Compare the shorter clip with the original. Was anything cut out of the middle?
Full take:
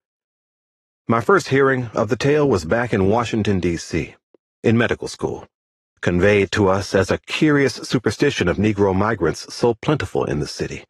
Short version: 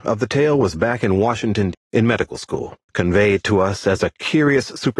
yes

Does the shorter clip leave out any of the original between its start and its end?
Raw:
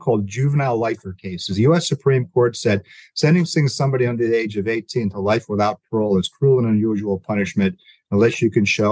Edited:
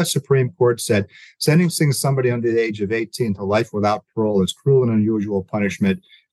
no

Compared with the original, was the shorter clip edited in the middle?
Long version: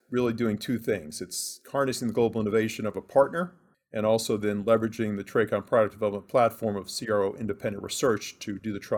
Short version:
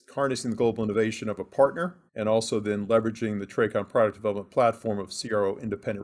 yes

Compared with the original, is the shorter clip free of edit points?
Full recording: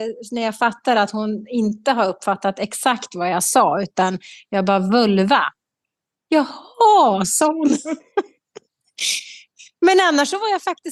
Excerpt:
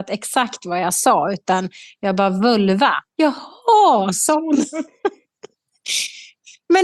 no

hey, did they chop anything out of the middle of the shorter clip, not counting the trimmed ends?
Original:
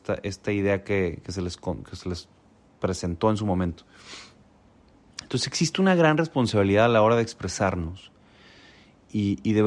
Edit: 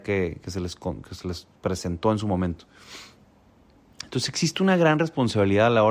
yes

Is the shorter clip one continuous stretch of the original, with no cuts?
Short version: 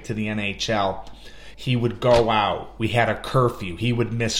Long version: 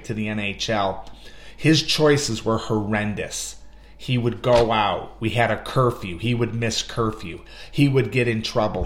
no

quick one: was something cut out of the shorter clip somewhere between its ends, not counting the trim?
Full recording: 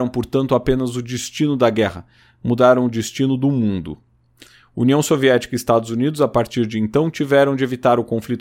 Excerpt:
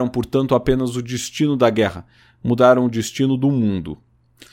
no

